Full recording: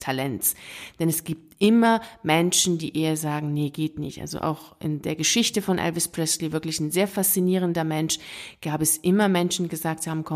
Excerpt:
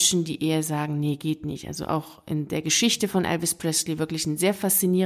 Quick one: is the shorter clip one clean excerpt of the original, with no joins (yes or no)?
yes